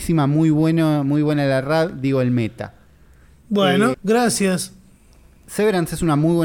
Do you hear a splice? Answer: yes; 1 cut; at 3.9 s

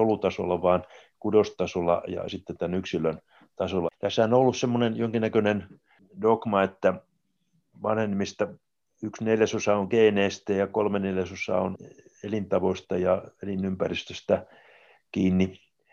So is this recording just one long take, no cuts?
no; 1 cut; at 3.9 s

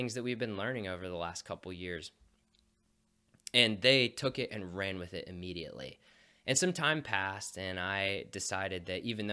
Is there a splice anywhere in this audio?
no; 0 cuts

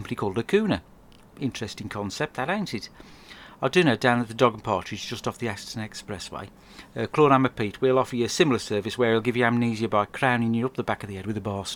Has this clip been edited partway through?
no; 0 cuts

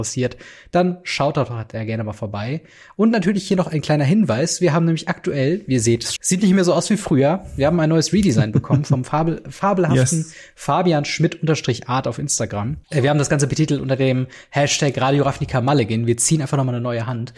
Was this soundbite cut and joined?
yes; 2 cuts; at 6.2 s, 12.8 s

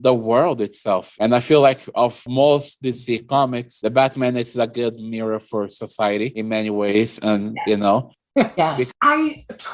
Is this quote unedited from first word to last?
yes; 0 cuts

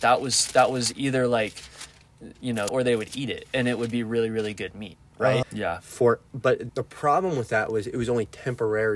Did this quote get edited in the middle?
yes; 3 cuts; at 2.7 s, 5.4 s, 6.7 s

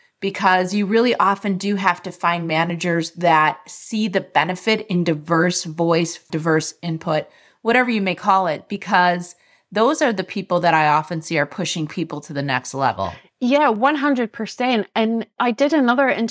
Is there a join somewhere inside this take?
yes; 1 cut; at 6.3 s

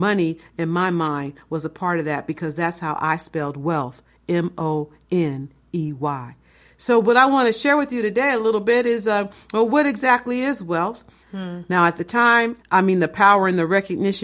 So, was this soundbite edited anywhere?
yes; 2 cuts; at 11.2 s, 12.6 s

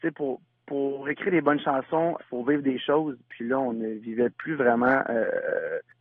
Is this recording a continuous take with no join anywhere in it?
no; 1 cut; at 2.2 s

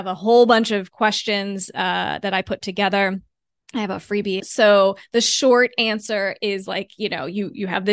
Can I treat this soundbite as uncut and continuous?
no; 1 cut; at 4.4 s

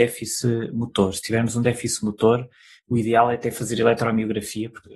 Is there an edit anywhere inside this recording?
no; 0 cuts

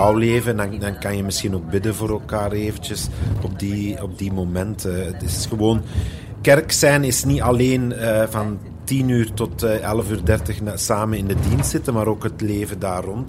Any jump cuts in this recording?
no; 0 cuts

